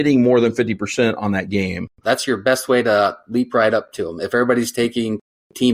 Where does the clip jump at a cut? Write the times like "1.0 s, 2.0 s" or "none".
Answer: 2.0 s